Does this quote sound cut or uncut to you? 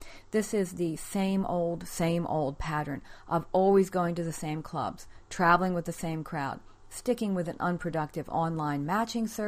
uncut